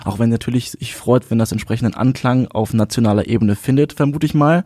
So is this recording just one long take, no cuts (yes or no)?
yes